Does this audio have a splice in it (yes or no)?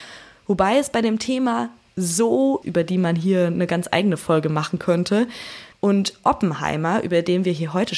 yes